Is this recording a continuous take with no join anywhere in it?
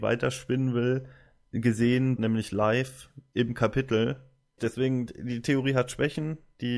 no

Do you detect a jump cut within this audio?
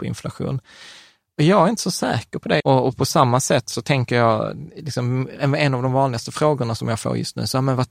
yes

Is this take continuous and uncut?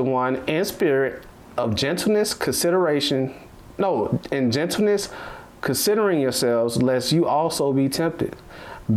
yes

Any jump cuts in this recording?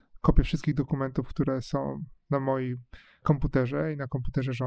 no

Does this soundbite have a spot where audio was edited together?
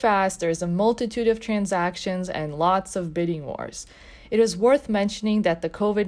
no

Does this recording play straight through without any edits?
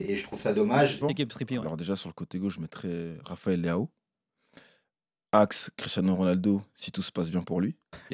no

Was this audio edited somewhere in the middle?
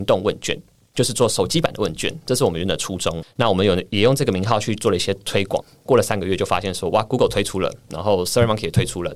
yes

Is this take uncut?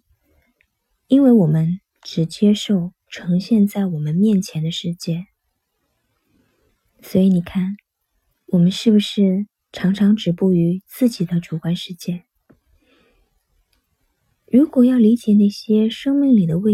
yes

